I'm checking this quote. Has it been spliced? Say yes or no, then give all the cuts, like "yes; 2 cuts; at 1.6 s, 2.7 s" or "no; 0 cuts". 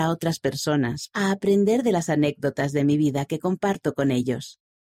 yes; 1 cut; at 1.1 s